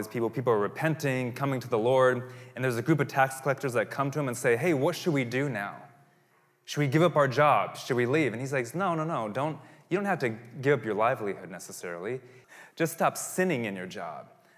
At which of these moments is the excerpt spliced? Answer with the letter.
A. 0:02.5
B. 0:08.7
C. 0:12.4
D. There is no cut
C